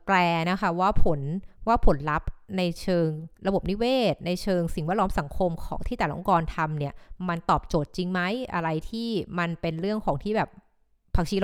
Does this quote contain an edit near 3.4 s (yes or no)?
yes